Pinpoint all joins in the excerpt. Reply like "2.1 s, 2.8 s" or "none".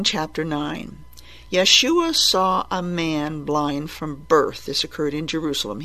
none